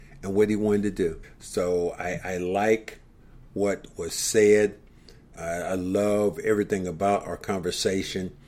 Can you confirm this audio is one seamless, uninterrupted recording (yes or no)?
no